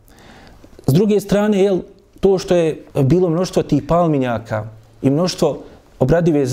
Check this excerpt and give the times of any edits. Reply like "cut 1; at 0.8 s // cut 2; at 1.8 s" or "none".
cut 1; at 2.9 s